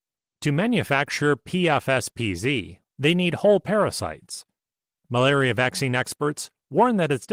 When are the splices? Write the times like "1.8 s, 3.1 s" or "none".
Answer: 2.8 s, 5.0 s